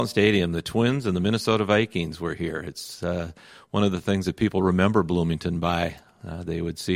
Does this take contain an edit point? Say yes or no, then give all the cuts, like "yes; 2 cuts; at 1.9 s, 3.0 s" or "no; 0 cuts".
no; 0 cuts